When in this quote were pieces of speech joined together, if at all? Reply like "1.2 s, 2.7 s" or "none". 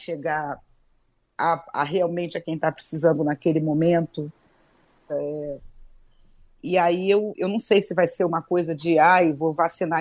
5.1 s